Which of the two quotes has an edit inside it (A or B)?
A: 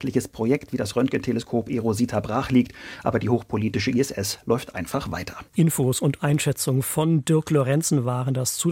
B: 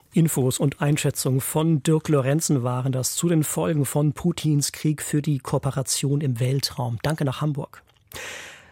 A